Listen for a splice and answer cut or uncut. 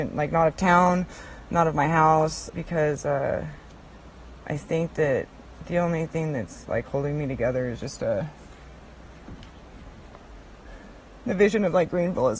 cut